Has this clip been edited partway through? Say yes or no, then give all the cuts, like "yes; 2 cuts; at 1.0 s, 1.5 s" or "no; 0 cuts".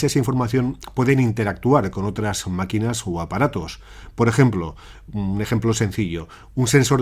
no; 0 cuts